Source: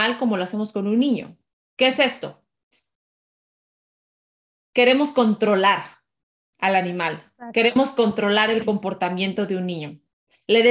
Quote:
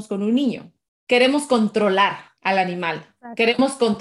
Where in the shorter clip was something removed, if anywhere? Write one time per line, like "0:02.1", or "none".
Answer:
0:01.0
0:02.4